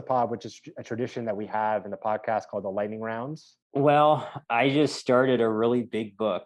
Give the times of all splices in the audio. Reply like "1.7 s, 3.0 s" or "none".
3.6 s